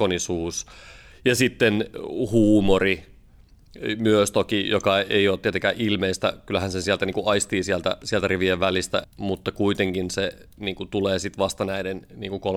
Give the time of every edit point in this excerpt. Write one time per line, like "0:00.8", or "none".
0:09.0